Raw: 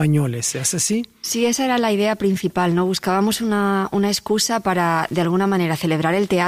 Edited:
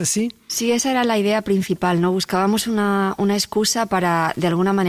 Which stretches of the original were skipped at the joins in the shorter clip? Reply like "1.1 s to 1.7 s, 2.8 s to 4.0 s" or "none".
none